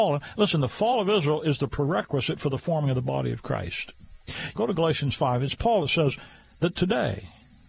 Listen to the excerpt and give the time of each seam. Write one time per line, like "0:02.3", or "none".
0:04.6